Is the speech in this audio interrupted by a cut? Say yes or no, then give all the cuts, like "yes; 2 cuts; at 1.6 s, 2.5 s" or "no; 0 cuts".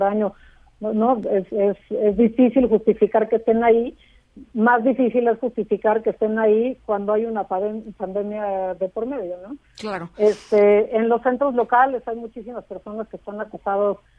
no; 0 cuts